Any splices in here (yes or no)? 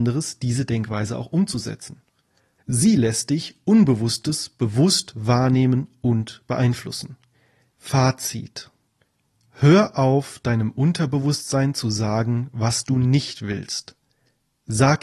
yes